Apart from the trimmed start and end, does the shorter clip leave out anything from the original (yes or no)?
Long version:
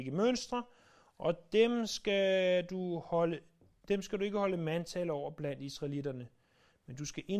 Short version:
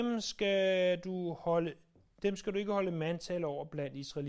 no